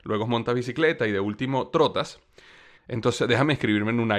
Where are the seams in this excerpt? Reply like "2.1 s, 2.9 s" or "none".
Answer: 2.8 s